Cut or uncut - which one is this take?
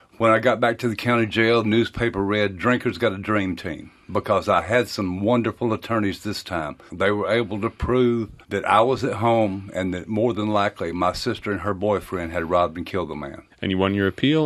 cut